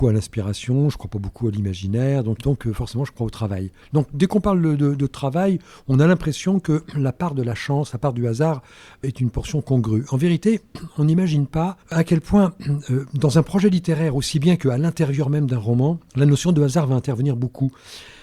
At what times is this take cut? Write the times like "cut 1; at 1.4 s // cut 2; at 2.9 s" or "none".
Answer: cut 1; at 2.4 s